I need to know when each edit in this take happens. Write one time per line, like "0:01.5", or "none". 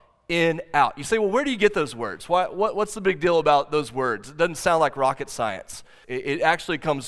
0:06.0

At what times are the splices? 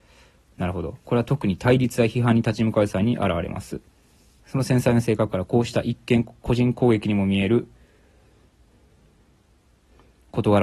0:04.4

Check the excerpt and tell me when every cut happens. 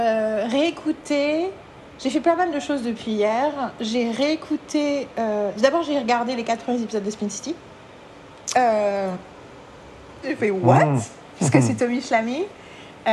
0:08.5
0:10.2

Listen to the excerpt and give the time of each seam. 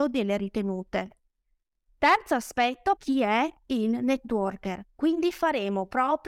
0:03.0

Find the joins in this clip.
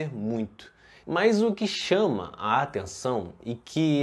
0:01.0

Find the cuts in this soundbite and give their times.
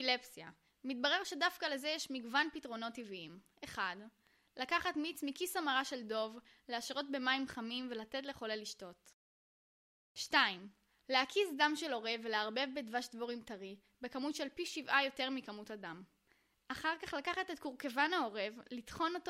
none

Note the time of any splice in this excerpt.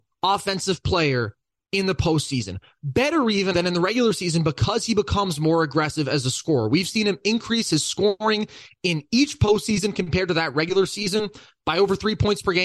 0:03.5

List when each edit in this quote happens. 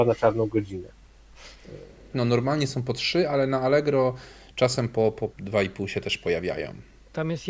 0:02.1
0:05.3

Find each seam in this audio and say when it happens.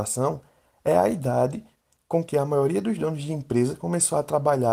none

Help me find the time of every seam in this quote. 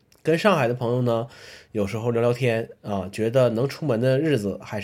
none

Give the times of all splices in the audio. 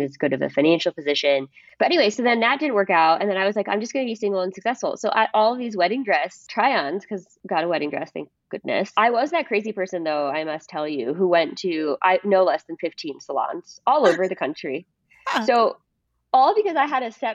0:01.7

